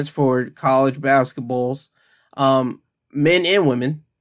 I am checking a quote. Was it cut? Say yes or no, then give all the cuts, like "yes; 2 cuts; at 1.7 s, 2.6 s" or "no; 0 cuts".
no; 0 cuts